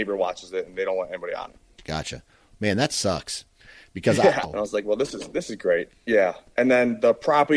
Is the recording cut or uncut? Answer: cut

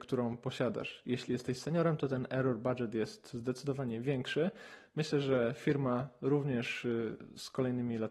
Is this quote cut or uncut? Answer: uncut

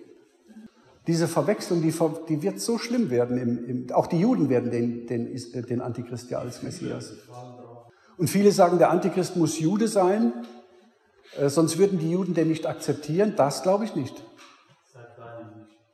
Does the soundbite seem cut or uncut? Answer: uncut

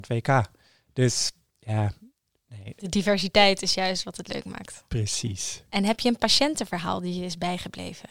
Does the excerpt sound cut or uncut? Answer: uncut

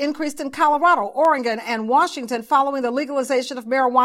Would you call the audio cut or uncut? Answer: uncut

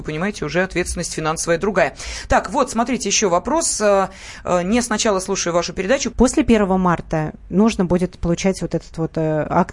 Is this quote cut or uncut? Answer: cut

